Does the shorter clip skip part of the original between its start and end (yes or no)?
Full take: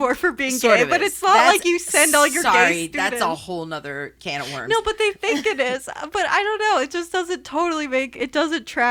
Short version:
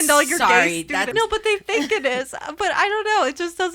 yes